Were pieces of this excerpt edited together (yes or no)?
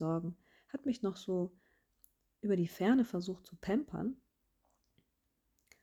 no